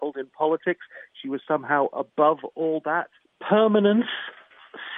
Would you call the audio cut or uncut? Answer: cut